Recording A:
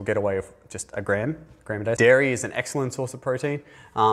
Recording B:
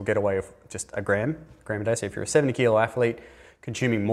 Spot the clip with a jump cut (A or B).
A